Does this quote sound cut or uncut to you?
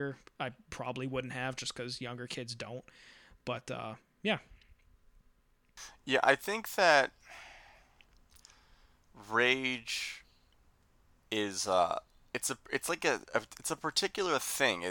uncut